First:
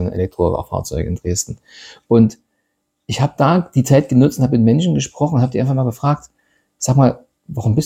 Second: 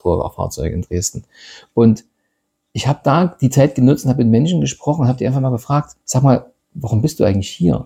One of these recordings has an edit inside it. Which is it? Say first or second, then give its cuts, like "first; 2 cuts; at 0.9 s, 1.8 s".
second; 1 cut; at 6.0 s